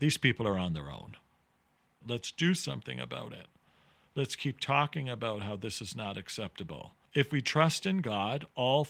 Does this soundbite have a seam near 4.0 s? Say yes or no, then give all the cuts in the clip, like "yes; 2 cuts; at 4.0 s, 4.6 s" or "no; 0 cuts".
no; 2 cuts; at 2.0 s, 7.0 s